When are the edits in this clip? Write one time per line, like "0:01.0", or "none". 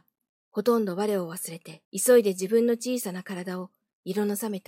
0:01.8